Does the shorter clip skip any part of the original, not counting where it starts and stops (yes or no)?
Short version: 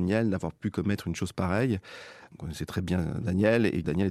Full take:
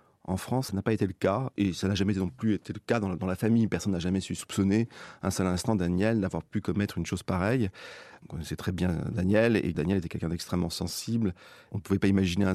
no